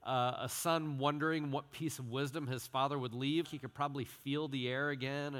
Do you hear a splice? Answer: yes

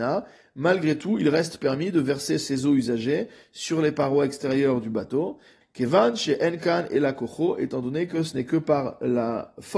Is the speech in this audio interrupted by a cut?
yes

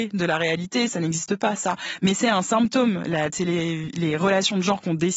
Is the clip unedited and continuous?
yes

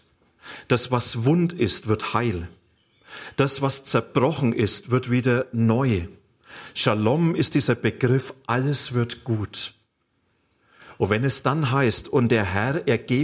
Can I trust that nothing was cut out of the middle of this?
yes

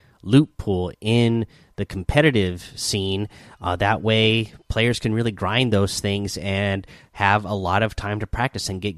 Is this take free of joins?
yes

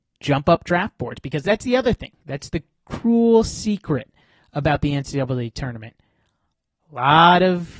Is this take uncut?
yes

